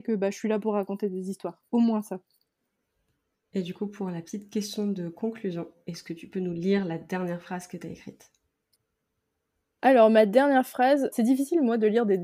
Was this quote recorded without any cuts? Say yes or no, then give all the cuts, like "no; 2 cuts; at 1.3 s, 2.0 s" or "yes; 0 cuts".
no; 1 cut; at 11.1 s